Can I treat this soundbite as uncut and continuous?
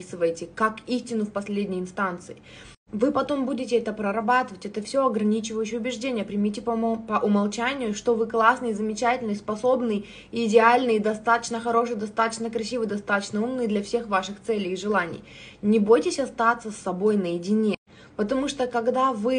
yes; 0 cuts

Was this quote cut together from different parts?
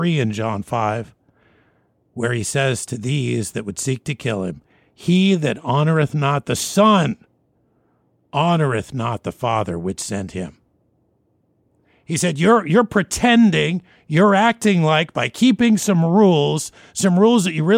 no; 0 cuts

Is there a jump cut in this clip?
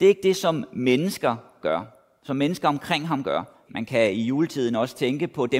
yes; 1 cut; at 3.7 s

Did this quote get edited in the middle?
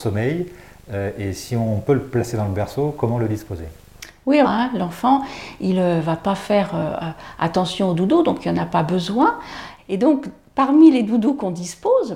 yes; 2 cuts; at 4.4 s, 9.8 s

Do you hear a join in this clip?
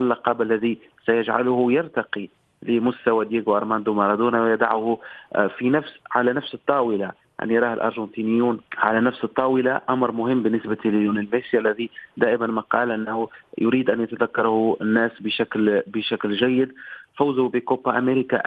yes; 1 cut; at 8.7 s

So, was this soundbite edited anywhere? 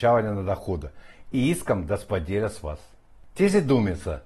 no; 0 cuts

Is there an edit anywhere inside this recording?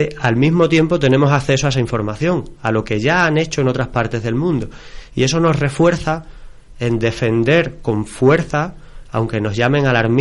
no; 0 cuts

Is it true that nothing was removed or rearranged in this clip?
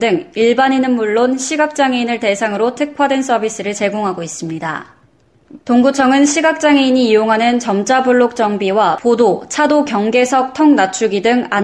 no; 1 cut; at 5.6 s

